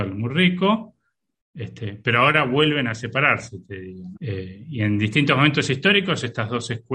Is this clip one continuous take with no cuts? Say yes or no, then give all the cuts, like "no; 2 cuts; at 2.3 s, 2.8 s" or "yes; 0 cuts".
no; 1 cut; at 4.1 s